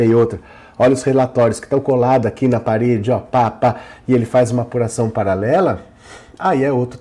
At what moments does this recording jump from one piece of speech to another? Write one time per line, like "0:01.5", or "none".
none